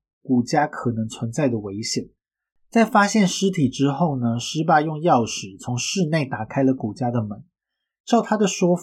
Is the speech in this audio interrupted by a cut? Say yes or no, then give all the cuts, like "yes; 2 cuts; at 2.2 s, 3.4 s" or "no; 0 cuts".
no; 0 cuts